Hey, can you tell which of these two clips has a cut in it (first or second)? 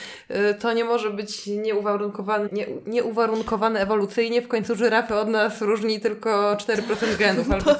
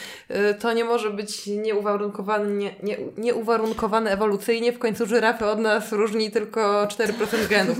first